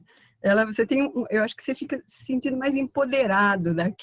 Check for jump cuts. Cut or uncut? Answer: uncut